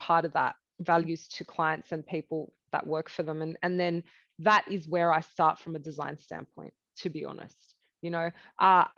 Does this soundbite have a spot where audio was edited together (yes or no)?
no